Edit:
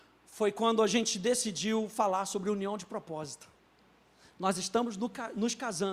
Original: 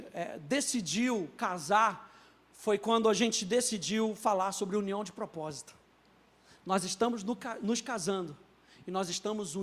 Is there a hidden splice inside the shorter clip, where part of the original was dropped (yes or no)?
no